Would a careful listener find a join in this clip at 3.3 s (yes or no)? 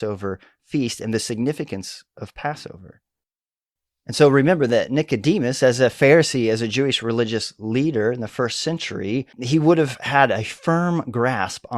no